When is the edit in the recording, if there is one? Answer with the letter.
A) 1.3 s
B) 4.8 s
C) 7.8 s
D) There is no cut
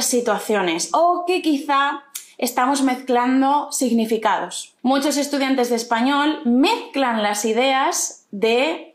B